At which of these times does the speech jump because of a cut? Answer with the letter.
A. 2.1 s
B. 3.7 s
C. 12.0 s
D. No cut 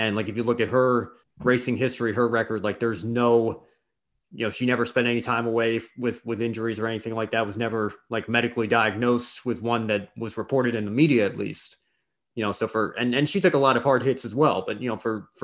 D